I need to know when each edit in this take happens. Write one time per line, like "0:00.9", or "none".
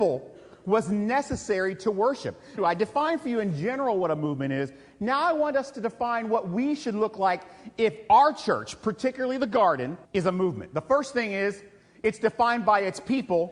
0:02.6
0:10.0